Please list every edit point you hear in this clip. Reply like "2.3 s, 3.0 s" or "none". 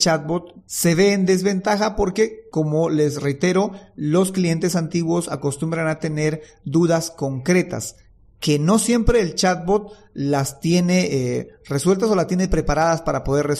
none